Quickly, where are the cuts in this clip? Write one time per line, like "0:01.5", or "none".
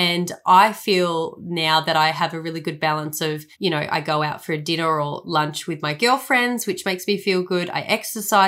0:03.5

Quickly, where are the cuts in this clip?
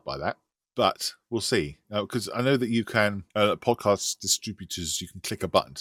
0:03.3

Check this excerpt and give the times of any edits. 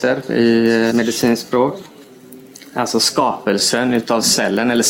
0:00.9

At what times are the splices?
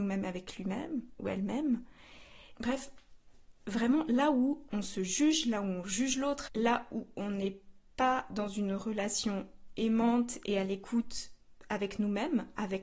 0:02.6
0:06.5

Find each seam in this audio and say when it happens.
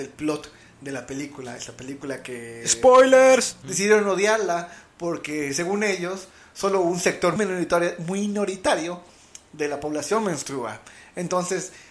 0:03.6
0:07.4

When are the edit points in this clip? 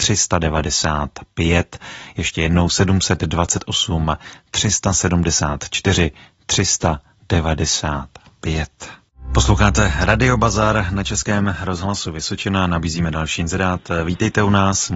none

